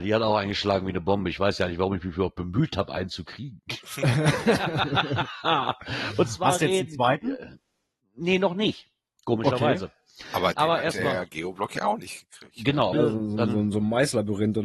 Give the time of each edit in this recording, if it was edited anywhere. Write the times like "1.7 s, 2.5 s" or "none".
12.9 s

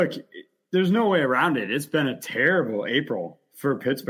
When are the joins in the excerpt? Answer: none

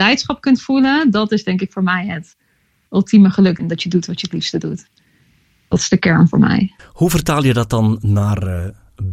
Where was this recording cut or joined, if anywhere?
3.6 s, 6.8 s

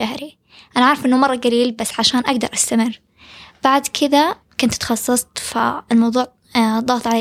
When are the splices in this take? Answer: none

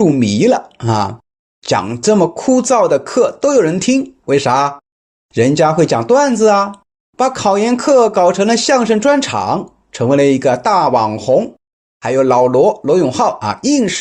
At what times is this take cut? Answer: 1.4 s, 4.2 s

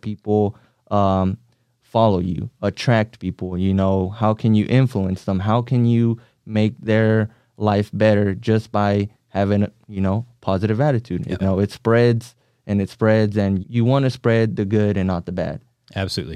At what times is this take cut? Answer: 11.4 s, 13.6 s

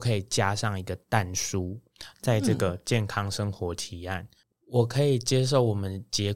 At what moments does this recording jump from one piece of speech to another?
4.5 s

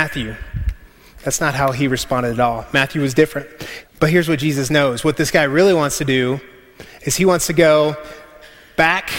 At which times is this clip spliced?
3.8 s

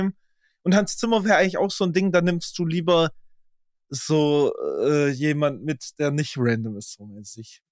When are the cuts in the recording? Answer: none

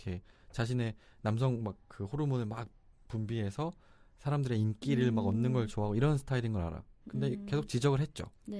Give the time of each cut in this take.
none

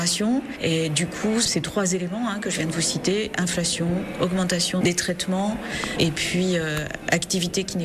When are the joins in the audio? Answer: 4.8 s

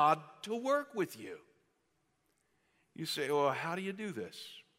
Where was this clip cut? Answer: none

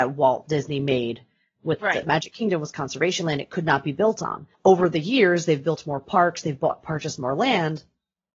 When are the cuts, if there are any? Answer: 2.0 s, 4.5 s

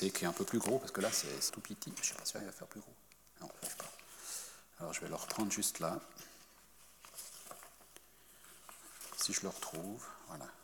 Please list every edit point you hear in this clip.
1.5 s

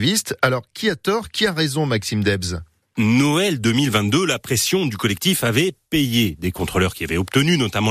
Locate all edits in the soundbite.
none

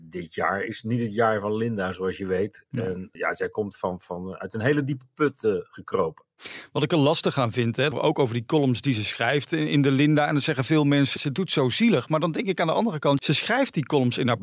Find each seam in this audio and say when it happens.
7.9 s, 11.2 s, 13.2 s

